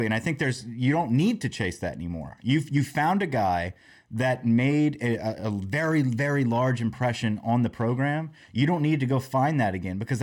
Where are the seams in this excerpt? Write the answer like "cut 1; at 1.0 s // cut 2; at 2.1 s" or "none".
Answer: none